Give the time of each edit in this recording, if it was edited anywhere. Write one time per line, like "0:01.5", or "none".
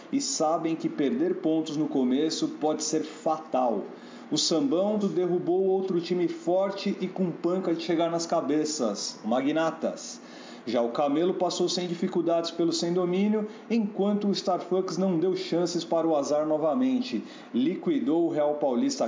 0:05.0